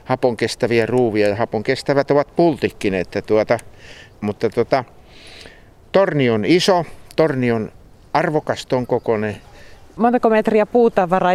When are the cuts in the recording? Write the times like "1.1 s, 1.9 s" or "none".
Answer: 4.1 s, 9.9 s